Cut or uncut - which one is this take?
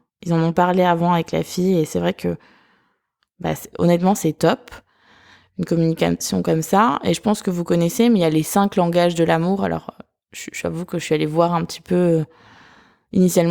uncut